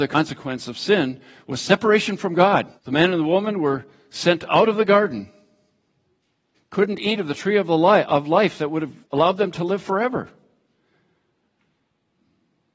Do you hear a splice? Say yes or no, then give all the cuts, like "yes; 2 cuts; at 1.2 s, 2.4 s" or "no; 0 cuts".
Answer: yes; 3 cuts; at 2.8 s, 6.5 s, 9.0 s